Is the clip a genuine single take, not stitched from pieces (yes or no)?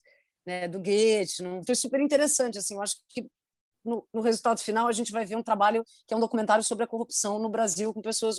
no